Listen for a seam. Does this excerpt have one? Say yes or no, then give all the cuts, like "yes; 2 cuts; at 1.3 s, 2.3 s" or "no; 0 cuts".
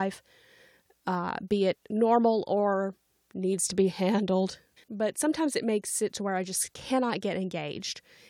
yes; 1 cut; at 4.8 s